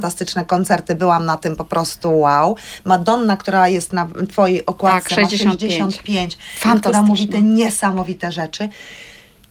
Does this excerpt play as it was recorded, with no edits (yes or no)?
yes